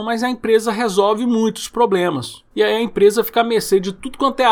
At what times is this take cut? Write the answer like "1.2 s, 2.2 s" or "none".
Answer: 2.5 s